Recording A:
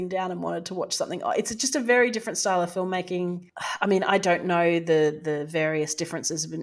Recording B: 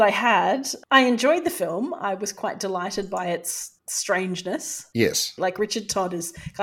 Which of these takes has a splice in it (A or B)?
B